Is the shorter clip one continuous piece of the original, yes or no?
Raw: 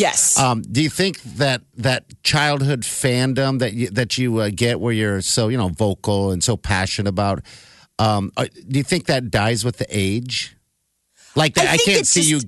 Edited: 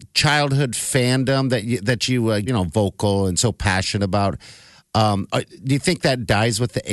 no